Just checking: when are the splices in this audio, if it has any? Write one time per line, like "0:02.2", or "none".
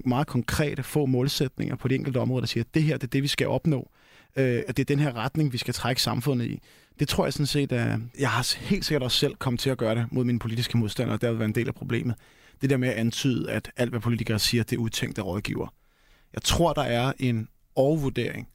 0:08.1